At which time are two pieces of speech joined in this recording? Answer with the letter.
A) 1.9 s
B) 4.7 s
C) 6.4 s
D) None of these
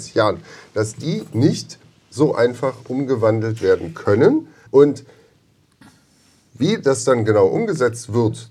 B